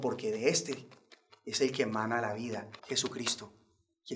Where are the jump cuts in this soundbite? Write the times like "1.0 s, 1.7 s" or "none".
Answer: 2.8 s